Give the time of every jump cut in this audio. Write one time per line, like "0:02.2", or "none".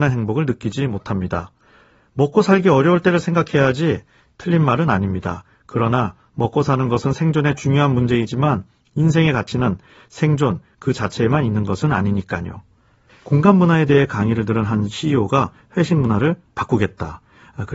0:13.1